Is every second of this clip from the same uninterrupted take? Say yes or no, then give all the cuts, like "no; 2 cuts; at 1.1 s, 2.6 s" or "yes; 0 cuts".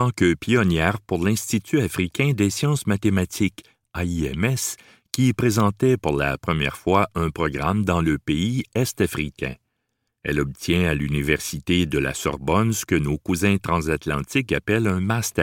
no; 1 cut; at 10.1 s